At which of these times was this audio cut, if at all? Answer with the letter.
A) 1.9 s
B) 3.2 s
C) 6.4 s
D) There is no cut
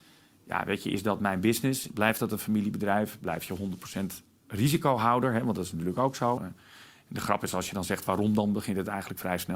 C